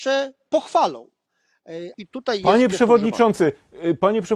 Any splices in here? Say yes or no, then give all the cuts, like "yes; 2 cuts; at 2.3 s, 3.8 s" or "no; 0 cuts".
yes; 1 cut; at 1.9 s